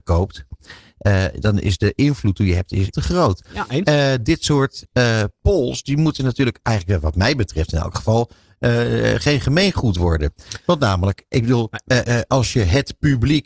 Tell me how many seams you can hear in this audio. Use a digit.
1